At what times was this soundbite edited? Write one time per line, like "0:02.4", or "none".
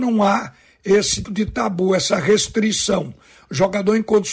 0:01.2